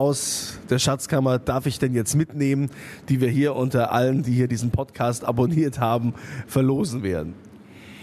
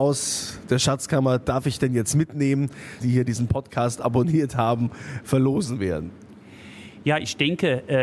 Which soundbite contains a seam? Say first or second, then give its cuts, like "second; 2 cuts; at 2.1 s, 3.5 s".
second; 1 cut; at 3.0 s